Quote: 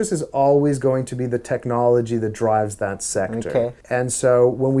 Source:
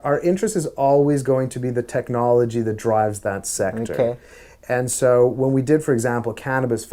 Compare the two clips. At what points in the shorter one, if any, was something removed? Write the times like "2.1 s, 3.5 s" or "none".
3.8 s